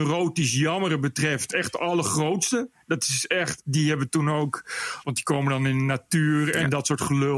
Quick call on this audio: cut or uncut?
cut